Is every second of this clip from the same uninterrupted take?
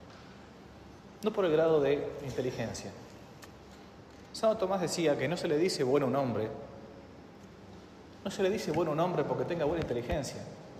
yes; 0 cuts

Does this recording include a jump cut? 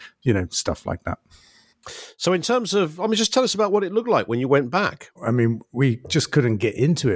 yes; 1 cut; at 5.2 s

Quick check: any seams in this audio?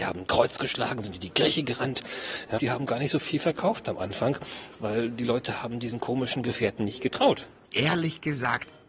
yes; 1 cut; at 2.6 s

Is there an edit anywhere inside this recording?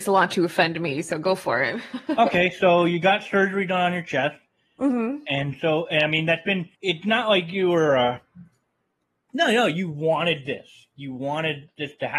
yes; 1 cut; at 6.7 s

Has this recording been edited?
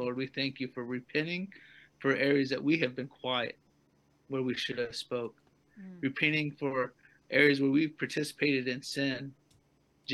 no; 0 cuts

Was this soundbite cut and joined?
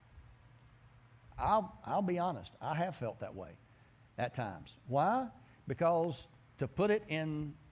no; 0 cuts

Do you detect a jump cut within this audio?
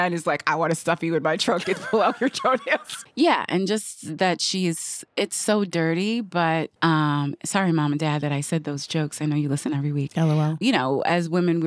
yes; 2 cuts; at 3.0 s, 6.8 s

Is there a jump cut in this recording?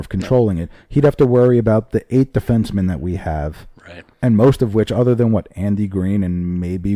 yes; 1 cut; at 4.1 s

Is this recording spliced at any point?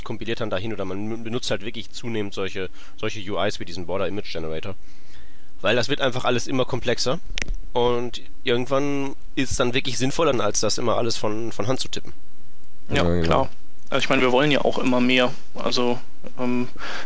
yes; 1 cut; at 10.3 s

